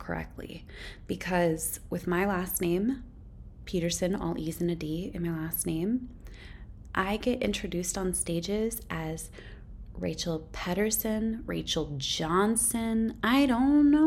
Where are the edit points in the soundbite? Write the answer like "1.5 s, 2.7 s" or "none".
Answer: 11.4 s

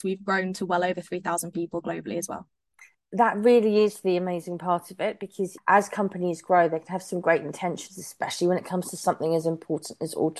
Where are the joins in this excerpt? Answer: 5.6 s

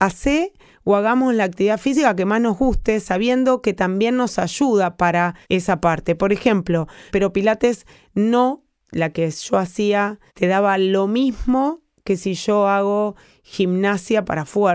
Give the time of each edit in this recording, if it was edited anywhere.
5.4 s, 7.1 s, 10.3 s

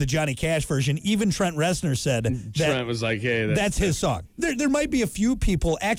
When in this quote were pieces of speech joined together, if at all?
4.2 s

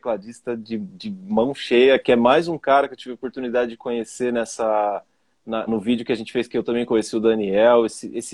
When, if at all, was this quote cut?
5.7 s

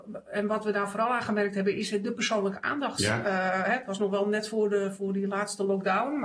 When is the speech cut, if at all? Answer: 3.0 s

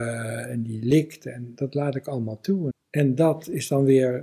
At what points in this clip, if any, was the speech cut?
2.7 s

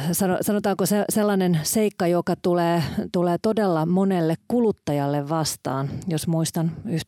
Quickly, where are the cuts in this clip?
none

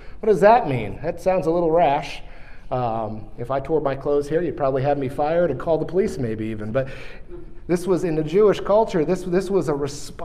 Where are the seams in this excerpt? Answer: none

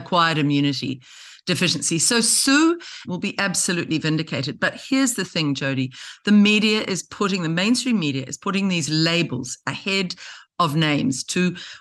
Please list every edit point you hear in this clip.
3.0 s

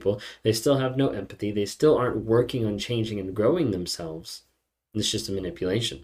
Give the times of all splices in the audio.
none

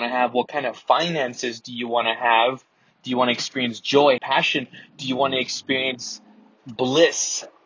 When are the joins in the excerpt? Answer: 2.9 s, 4.2 s

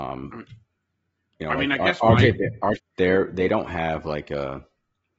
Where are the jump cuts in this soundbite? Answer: 2.8 s

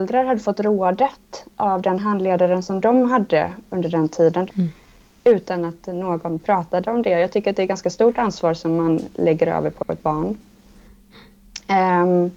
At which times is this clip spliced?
4.5 s

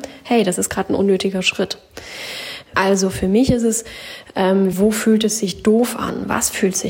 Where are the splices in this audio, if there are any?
2.7 s, 4.7 s

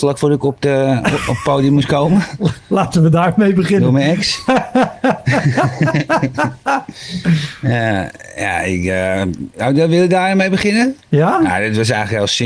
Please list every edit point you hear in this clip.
none

